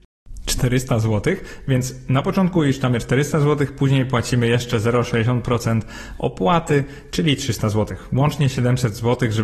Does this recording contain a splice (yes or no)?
no